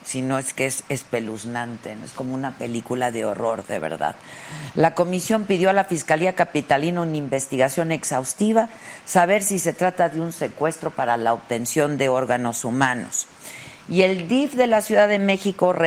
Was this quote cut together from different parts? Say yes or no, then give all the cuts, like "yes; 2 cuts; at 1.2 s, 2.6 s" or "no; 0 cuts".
no; 0 cuts